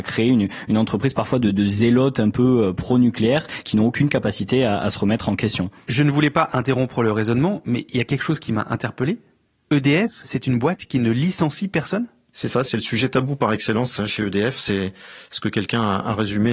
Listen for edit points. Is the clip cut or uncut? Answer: uncut